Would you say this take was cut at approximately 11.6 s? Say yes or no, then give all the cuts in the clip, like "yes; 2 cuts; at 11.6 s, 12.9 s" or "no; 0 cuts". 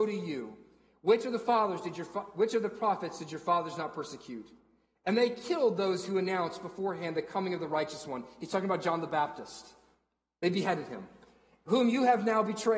no; 0 cuts